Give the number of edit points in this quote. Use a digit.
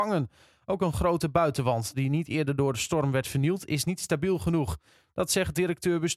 0